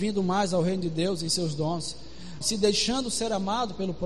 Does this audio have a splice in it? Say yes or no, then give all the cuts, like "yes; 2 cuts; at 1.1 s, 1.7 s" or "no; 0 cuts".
yes; 1 cut; at 2.4 s